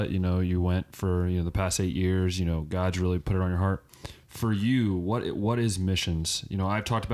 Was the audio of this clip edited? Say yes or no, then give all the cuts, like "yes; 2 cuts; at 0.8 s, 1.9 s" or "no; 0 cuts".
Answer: no; 0 cuts